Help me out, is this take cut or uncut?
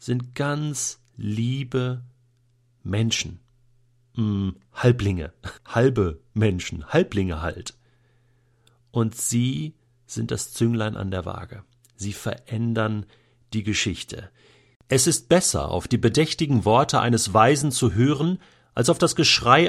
cut